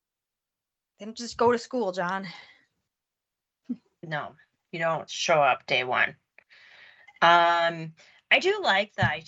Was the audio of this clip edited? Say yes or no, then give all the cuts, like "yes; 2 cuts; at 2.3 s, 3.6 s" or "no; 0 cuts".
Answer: yes; 1 cut; at 5.1 s